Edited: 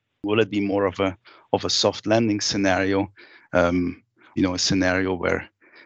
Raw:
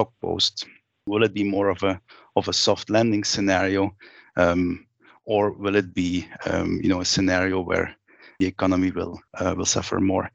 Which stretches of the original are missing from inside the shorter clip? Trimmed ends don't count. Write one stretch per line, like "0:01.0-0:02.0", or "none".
0:05.2-0:06.8